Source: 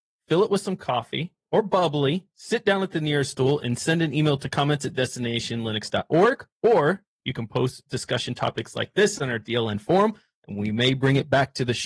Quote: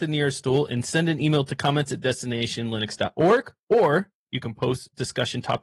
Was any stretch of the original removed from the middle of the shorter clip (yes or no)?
no